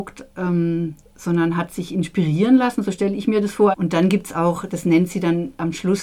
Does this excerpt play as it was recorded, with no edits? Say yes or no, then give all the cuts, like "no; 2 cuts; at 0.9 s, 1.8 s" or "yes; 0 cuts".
no; 1 cut; at 3.7 s